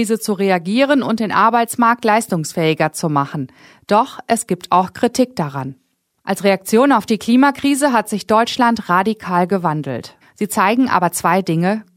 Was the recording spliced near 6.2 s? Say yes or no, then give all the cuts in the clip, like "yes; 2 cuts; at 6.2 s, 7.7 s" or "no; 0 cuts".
yes; 2 cuts; at 6.2 s, 10.2 s